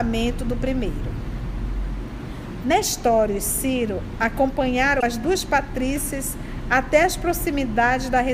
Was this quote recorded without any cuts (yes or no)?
no